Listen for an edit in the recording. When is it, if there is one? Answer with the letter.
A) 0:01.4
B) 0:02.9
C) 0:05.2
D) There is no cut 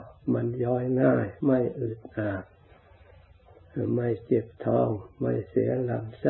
A